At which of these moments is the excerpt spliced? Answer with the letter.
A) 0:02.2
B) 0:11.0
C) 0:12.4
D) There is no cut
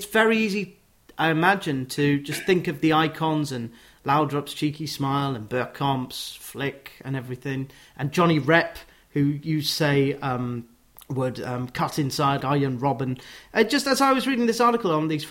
C